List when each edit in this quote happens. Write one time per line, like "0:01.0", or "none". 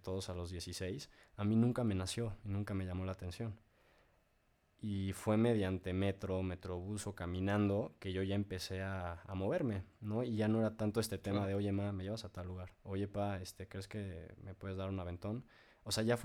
0:12.7